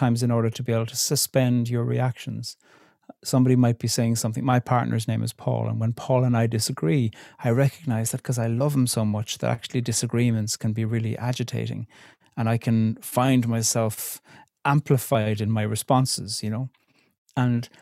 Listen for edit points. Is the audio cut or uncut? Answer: uncut